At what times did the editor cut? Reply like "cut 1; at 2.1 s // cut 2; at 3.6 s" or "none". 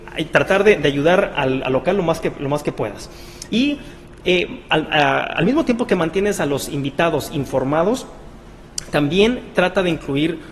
cut 1; at 3.5 s